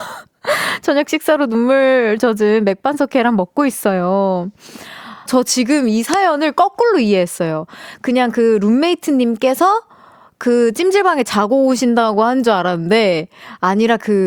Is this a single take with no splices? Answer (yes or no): no